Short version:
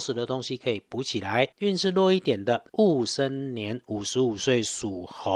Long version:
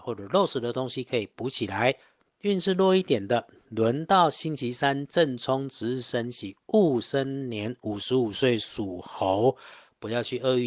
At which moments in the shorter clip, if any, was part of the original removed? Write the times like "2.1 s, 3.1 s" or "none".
1.5 s, 2.7 s